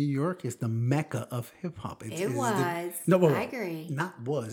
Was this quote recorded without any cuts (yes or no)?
yes